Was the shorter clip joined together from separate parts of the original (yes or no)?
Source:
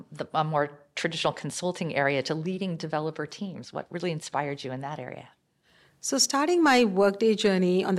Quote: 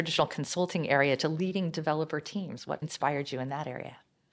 yes